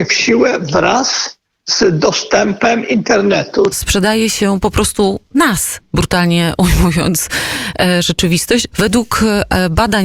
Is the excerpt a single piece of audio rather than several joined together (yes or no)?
no